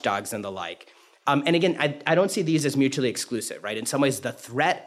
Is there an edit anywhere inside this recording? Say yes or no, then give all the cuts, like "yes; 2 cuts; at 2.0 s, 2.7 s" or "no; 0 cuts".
no; 0 cuts